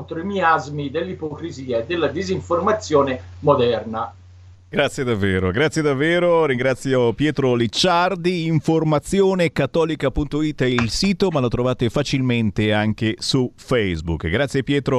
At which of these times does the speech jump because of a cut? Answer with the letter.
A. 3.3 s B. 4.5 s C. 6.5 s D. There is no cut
B